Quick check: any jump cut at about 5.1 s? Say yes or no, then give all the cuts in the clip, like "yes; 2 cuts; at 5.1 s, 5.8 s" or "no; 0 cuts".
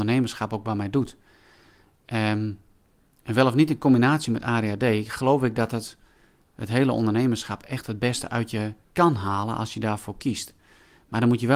no; 1 cut; at 8.8 s